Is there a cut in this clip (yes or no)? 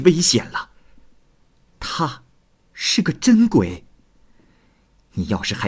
no